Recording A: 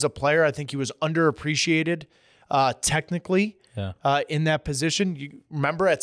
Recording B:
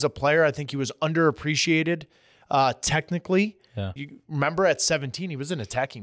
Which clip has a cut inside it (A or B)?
B